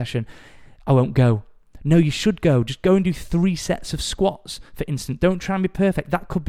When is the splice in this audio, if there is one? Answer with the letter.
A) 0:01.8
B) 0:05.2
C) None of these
C